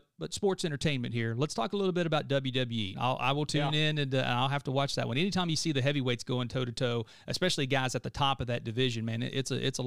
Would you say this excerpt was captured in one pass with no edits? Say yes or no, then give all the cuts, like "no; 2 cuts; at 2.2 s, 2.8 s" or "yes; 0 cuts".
no; 1 cut; at 2.9 s